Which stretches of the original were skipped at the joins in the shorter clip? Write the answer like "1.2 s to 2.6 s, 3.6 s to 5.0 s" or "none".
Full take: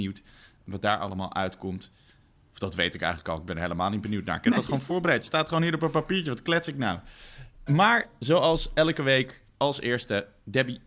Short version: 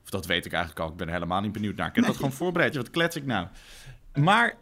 5.2 s to 6.2 s

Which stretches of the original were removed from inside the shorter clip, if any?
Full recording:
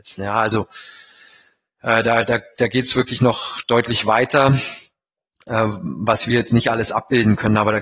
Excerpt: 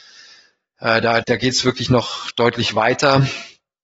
2.2 s to 2.5 s

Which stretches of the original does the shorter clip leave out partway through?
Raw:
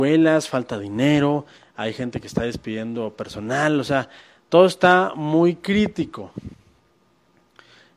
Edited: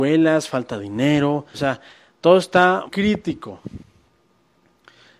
1.5 s to 3.8 s, 5.1 s to 5.6 s

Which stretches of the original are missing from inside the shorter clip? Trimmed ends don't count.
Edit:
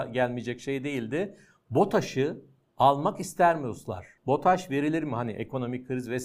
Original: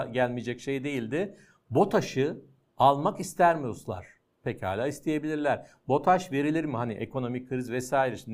4.2 s to 5.8 s

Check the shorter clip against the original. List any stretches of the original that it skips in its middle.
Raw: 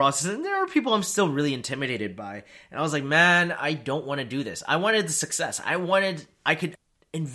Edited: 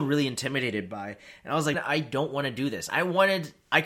3.0 s to 3.5 s, 4.6 s to 5.6 s

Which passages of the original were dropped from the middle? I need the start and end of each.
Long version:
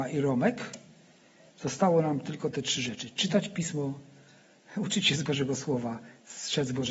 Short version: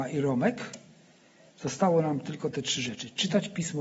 none

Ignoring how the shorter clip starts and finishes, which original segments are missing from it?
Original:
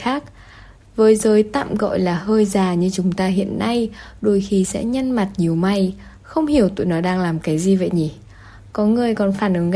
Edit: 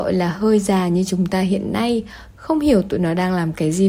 4.2 s to 6.2 s

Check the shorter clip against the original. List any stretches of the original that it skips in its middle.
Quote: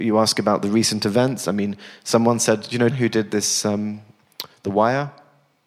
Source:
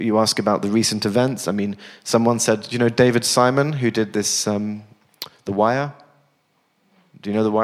2.9 s to 3.7 s

